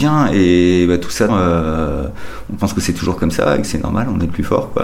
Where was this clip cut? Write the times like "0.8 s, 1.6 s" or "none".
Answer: 1.3 s, 3.7 s